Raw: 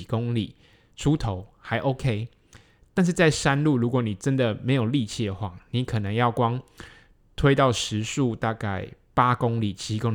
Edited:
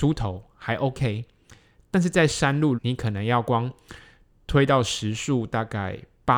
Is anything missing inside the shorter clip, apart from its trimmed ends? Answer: yes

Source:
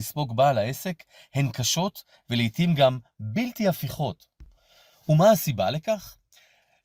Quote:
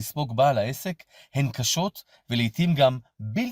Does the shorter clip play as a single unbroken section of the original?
yes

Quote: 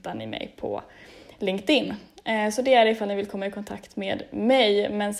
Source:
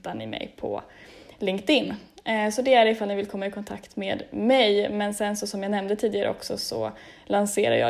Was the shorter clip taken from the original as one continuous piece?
yes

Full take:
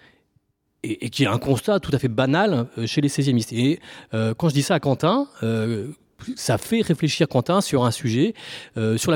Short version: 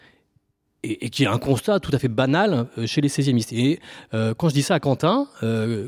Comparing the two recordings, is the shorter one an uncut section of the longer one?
yes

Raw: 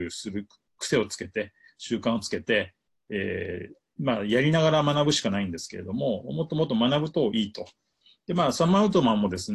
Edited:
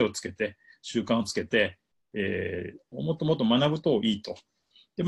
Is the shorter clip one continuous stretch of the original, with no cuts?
no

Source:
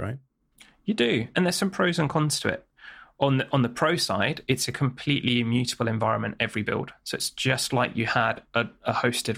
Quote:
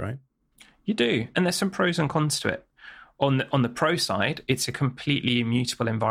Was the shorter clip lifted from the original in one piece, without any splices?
yes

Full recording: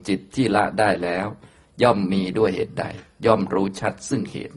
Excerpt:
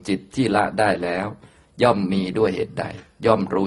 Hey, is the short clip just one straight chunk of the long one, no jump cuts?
yes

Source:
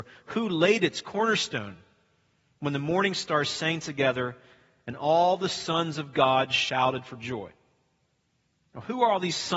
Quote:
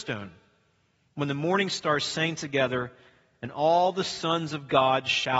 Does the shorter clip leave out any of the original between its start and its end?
no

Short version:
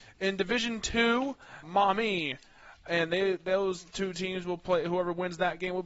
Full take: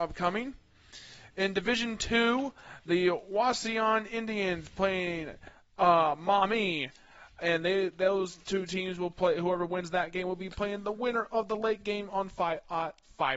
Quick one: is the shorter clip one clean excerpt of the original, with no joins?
no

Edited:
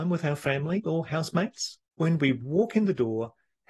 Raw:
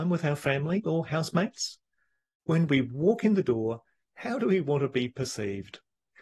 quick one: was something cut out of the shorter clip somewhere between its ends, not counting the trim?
yes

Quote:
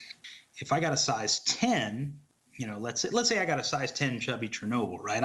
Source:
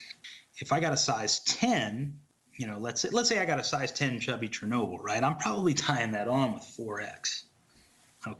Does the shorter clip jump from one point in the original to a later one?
no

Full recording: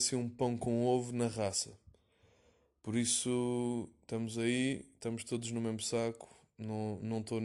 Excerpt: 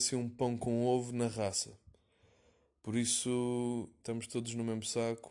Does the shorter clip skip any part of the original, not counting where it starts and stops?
yes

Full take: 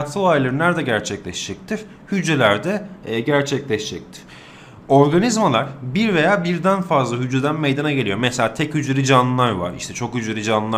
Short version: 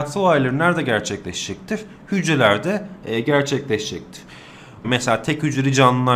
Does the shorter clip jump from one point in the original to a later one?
yes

